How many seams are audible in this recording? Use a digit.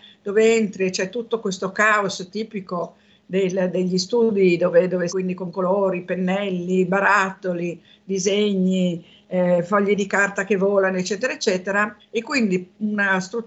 2